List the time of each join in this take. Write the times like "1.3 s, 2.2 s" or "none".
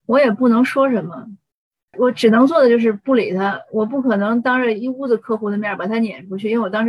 1.9 s